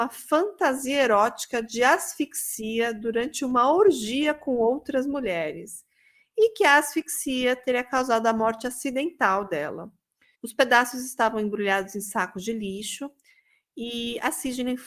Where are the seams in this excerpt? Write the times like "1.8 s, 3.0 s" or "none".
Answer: 10.3 s